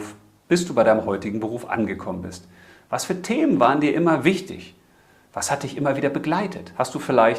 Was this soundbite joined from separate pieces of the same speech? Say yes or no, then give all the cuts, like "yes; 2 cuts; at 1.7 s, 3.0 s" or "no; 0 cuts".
no; 0 cuts